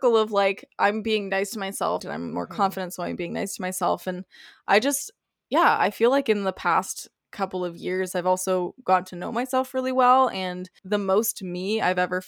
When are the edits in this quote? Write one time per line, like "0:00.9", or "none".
0:02.0
0:08.1